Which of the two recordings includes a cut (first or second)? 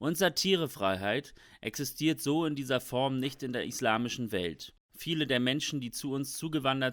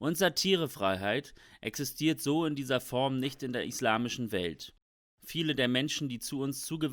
first